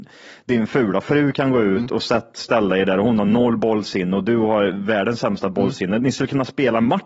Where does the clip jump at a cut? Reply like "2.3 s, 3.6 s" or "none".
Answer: none